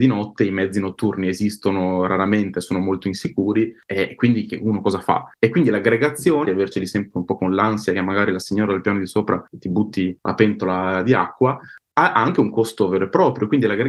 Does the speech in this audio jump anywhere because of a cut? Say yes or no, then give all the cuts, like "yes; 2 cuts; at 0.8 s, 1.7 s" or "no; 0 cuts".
yes; 2 cuts; at 5.3 s, 6.4 s